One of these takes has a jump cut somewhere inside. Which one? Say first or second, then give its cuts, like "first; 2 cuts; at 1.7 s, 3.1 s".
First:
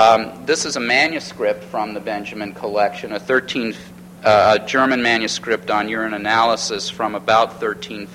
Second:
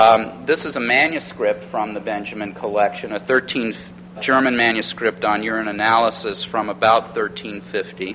second; 1 cut; at 4.2 s